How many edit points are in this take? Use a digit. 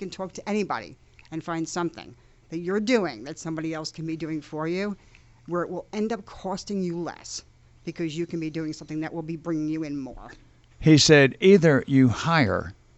1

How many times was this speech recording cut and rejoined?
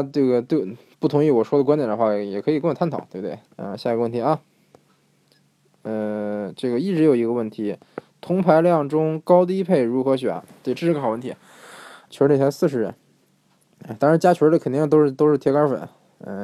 3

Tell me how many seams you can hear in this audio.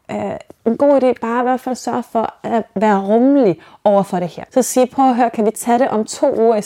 1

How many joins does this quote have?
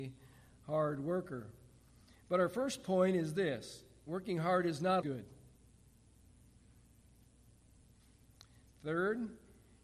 2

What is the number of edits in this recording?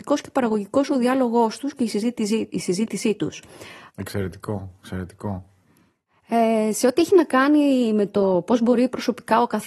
1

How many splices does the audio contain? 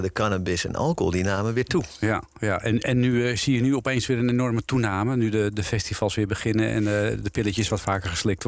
0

